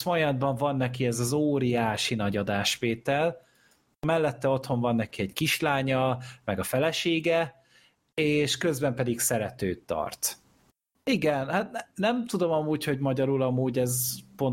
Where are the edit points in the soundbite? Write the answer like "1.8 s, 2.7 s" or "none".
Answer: 10.9 s